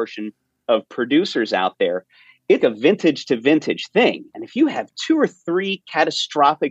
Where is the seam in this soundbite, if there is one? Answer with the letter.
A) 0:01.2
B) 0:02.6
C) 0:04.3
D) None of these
B